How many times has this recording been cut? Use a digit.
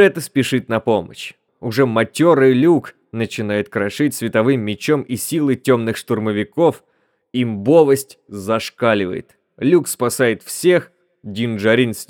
1